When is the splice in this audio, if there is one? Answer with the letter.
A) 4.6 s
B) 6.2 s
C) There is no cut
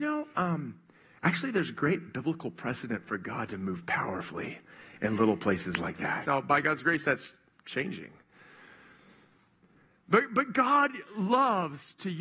B